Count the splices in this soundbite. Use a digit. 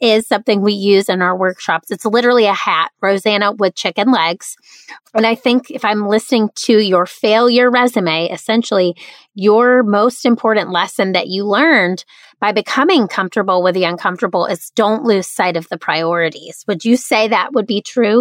1